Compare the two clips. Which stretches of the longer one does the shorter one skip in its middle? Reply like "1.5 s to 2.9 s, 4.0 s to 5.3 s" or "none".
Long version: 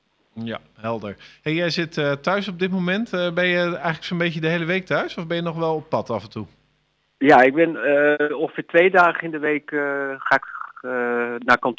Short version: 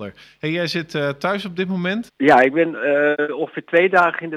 3.1 s to 7.1 s